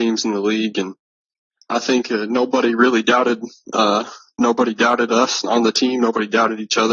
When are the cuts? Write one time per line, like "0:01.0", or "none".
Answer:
none